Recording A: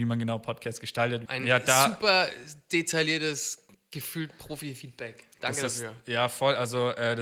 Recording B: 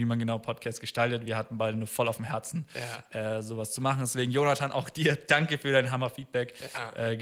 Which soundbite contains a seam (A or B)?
A